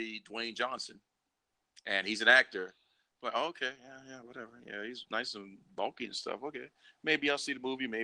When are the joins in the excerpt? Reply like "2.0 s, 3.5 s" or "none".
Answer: none

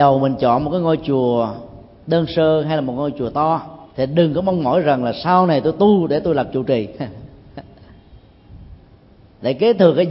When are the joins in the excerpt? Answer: 3.9 s

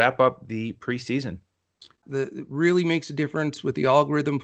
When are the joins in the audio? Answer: 2.0 s

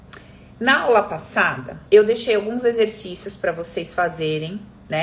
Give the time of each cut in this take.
1.9 s

